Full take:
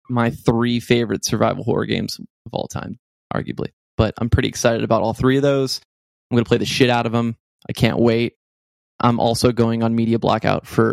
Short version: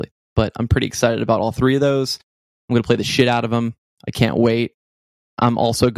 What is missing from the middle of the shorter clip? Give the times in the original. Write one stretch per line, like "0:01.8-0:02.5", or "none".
none